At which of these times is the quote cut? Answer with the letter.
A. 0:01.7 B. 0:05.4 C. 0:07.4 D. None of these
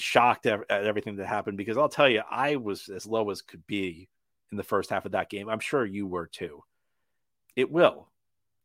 C